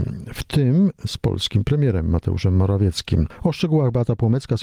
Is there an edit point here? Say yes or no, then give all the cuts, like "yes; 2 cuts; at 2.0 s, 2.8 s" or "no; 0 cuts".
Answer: no; 0 cuts